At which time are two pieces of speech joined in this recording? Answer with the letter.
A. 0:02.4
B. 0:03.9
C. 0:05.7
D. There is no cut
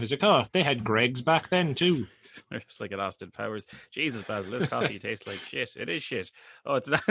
D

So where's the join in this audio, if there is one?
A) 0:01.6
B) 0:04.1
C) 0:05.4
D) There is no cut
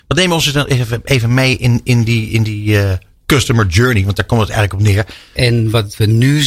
C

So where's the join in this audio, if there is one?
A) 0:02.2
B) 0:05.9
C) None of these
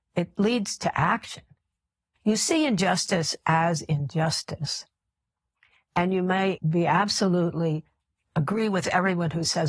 A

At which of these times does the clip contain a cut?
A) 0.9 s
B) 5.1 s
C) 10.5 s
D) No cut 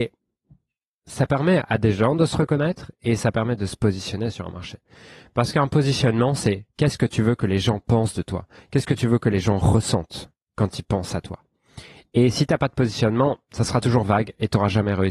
D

